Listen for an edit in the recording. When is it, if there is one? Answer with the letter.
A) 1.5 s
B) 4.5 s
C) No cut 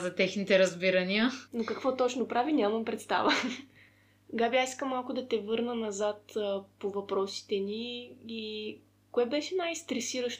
A